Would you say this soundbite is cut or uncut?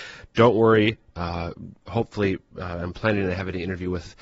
cut